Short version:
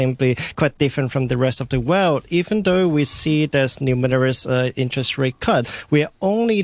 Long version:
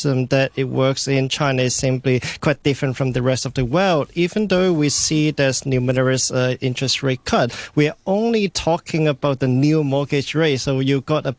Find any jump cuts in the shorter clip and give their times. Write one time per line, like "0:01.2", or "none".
none